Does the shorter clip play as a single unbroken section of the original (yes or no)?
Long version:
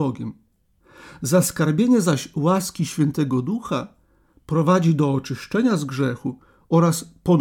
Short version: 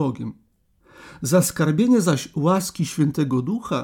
yes